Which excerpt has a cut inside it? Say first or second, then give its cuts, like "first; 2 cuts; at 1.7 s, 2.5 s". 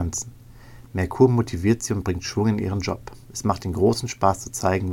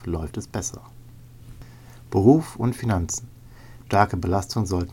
second; 1 cut; at 3.9 s